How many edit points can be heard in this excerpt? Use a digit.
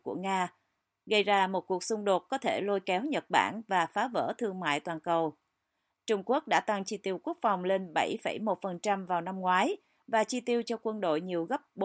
1